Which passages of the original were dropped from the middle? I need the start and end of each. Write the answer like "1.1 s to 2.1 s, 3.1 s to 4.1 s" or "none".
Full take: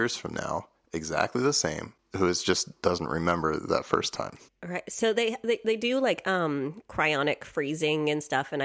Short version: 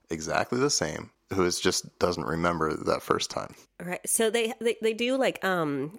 none